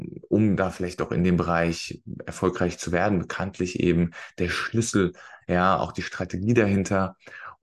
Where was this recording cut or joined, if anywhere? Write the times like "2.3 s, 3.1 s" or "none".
none